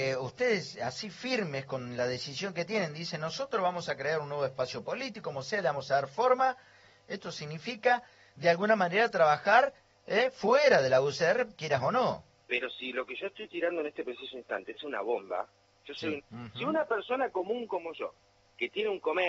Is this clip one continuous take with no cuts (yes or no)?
no